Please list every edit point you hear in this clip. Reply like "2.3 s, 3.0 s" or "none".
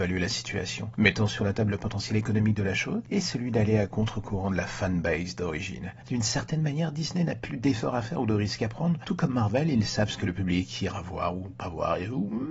6.0 s